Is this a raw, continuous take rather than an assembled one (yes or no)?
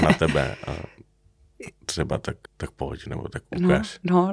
no